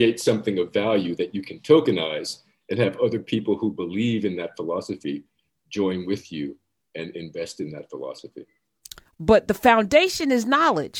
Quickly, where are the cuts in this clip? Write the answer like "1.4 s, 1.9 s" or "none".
9.1 s